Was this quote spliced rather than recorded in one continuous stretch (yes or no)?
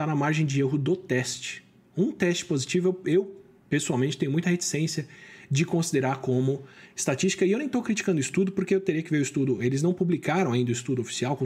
no